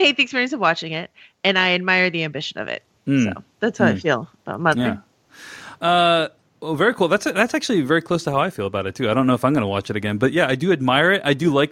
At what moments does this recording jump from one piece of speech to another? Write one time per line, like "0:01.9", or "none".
none